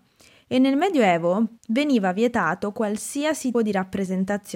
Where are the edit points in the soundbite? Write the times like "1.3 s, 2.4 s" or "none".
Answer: 1.6 s, 3.5 s

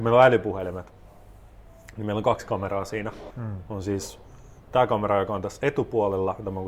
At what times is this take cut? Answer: 3.3 s

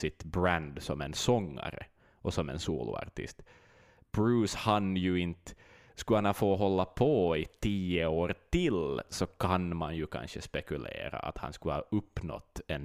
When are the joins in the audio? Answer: none

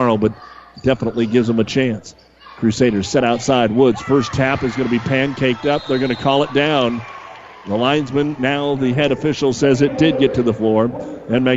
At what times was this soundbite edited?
none

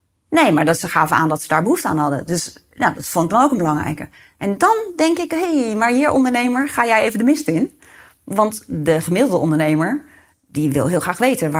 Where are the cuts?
none

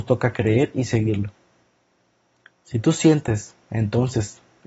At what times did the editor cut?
none

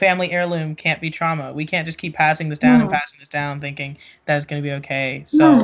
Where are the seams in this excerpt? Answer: none

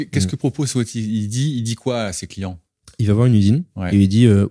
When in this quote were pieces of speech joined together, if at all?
none

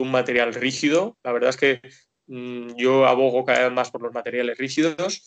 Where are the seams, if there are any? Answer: none

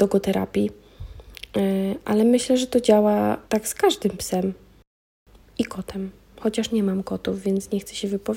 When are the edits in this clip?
3.4 s

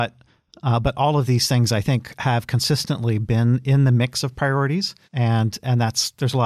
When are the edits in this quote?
5.0 s

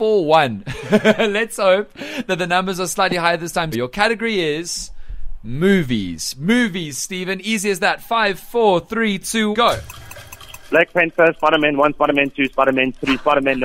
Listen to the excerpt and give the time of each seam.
3.7 s, 9.5 s

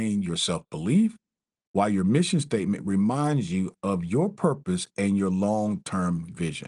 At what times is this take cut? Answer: none

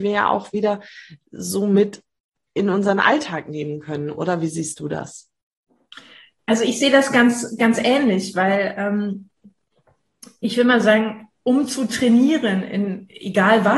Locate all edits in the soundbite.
none

